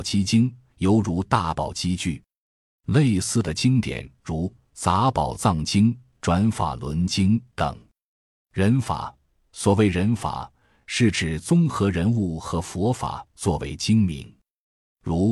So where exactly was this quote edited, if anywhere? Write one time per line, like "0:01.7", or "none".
none